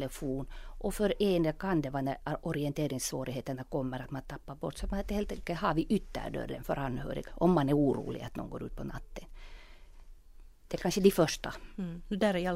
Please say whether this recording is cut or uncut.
cut